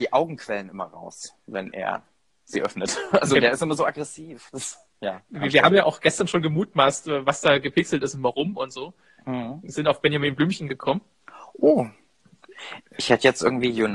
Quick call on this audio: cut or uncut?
uncut